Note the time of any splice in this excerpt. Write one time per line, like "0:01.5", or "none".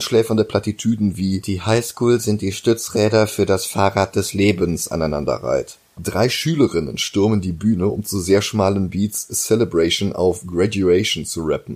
0:06.0